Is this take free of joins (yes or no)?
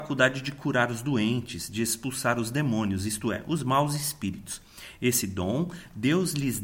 yes